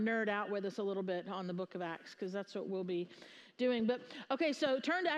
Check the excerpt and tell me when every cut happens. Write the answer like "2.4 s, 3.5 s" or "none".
none